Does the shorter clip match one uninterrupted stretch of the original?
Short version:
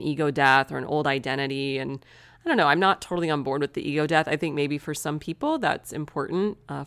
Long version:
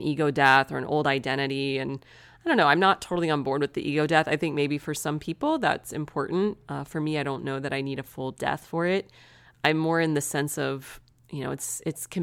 yes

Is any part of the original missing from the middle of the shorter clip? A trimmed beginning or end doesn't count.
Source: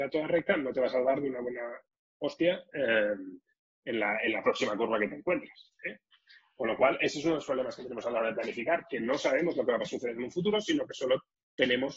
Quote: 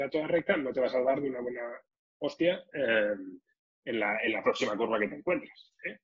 no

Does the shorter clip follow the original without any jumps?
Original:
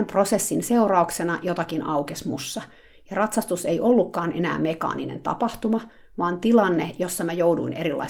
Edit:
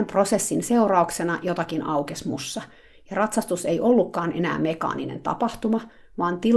yes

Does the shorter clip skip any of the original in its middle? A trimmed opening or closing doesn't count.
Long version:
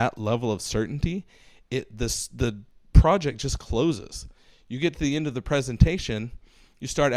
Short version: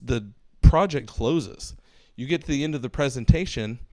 yes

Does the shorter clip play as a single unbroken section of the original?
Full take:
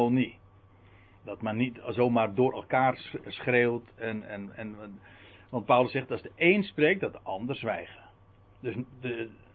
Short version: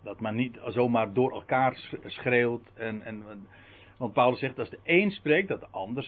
no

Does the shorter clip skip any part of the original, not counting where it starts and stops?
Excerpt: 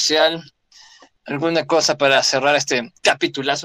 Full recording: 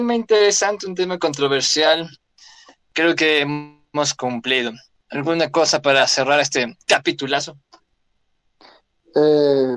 yes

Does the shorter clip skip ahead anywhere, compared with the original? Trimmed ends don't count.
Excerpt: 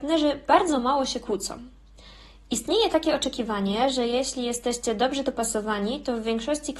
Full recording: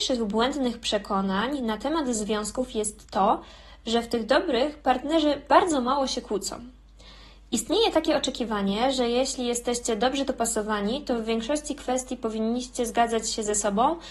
no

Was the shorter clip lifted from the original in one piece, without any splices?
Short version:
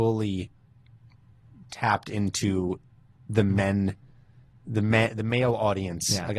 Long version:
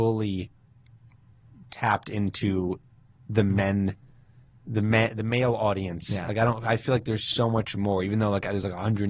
yes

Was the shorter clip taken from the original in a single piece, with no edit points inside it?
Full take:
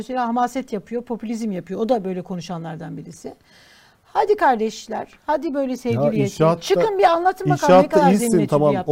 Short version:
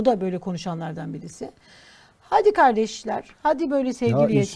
yes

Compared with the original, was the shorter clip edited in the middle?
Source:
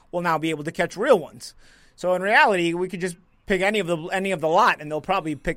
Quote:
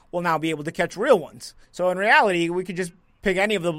yes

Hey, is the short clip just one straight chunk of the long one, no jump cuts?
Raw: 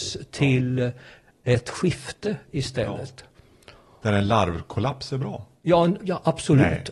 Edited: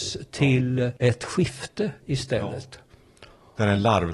no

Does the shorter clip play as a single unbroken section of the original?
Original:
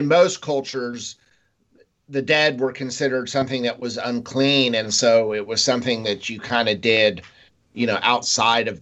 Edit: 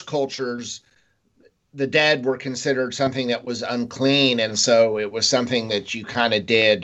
yes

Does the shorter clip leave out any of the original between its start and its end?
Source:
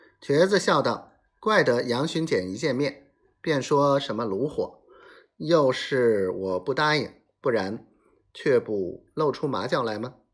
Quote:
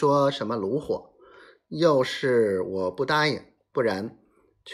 no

